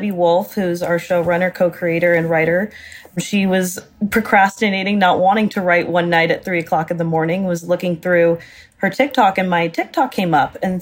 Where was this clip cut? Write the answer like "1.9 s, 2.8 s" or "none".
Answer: none